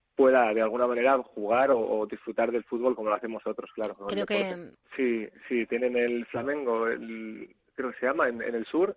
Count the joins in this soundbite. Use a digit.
1